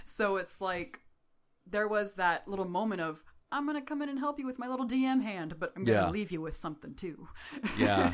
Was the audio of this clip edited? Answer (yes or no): yes